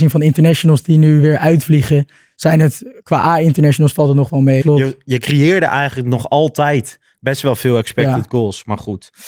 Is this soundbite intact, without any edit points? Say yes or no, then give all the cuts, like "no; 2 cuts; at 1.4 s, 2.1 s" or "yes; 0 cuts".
no; 1 cut; at 4.6 s